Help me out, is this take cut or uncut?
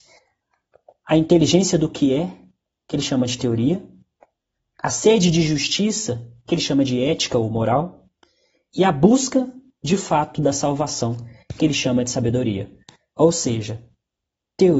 uncut